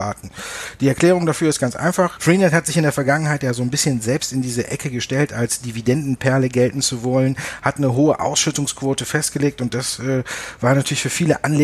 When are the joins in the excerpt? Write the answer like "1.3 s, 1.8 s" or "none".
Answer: 2.2 s